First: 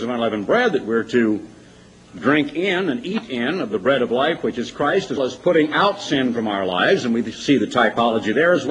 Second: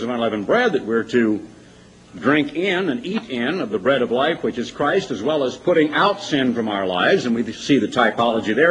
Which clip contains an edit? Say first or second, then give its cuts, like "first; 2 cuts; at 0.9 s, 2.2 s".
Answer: first; 1 cut; at 5.2 s